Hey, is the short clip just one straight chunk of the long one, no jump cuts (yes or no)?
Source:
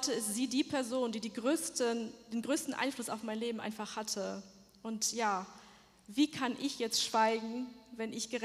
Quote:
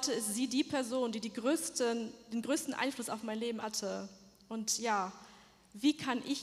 no